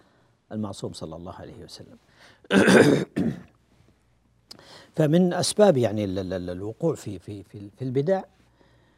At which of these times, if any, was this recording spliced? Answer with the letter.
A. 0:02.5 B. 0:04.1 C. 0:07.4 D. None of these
C